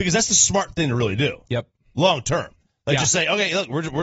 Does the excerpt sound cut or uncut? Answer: uncut